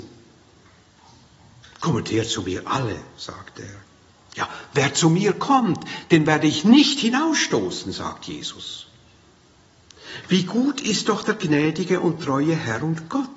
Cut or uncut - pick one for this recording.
uncut